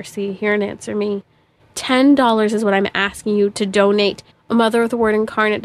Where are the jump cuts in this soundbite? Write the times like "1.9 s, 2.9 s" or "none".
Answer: 1.6 s, 4.3 s